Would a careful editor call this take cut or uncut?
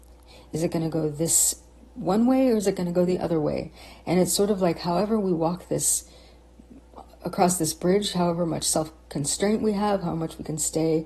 uncut